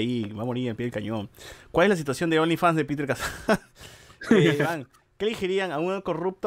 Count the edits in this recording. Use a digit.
0